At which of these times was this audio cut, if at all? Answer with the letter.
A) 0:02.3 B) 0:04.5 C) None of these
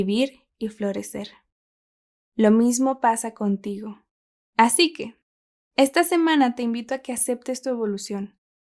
B